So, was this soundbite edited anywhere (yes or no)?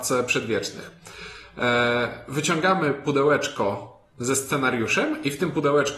no